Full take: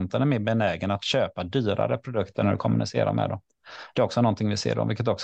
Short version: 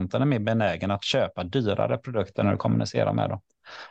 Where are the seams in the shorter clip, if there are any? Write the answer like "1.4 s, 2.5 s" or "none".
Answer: none